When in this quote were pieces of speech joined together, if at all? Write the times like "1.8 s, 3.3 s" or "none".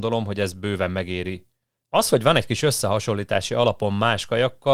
1.8 s